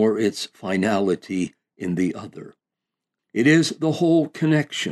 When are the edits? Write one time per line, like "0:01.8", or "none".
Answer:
0:03.2